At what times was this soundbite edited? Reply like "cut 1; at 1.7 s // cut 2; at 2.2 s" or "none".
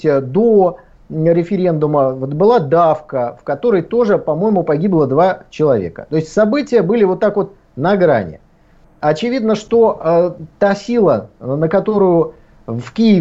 none